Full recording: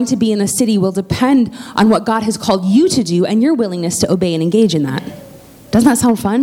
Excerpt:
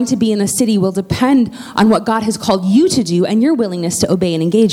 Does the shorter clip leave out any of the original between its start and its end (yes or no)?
no